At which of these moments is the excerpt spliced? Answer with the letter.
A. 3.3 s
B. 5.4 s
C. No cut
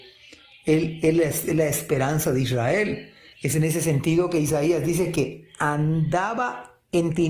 A